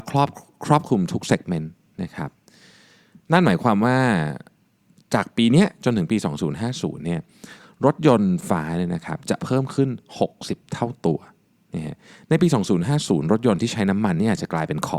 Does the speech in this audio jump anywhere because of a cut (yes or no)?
yes